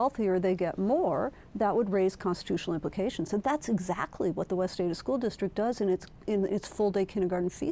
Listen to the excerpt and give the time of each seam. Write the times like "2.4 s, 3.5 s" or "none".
none